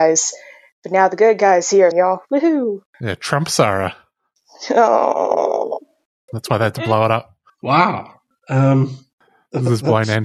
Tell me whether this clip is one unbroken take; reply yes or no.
no